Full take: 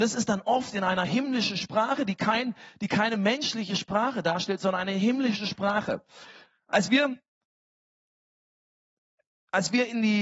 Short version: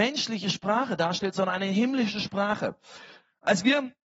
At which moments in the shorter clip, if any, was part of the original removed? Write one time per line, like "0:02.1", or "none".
none